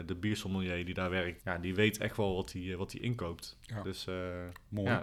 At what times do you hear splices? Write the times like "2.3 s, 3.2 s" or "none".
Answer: 1.4 s